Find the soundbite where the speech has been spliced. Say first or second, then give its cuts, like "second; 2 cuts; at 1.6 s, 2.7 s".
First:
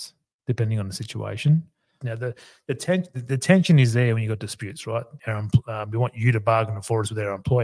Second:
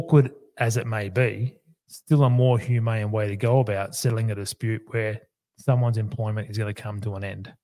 first; 2 cuts; at 2.0 s, 5.2 s